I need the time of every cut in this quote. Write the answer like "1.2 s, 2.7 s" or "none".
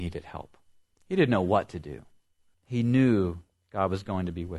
2.5 s